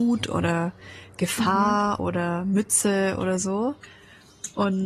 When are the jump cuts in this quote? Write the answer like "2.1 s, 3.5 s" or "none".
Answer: none